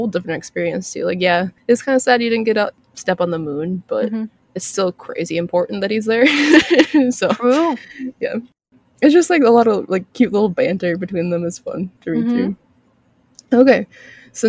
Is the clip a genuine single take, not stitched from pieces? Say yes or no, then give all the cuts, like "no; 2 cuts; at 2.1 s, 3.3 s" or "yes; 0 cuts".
yes; 0 cuts